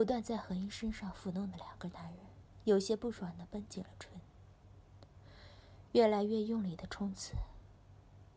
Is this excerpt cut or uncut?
uncut